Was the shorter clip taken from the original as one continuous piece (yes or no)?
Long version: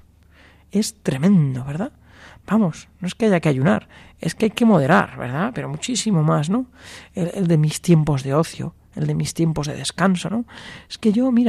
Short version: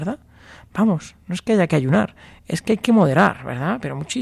yes